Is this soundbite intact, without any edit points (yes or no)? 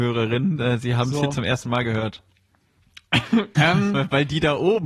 no